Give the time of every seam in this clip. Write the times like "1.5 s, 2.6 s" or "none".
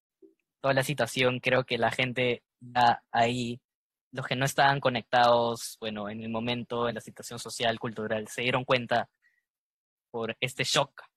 none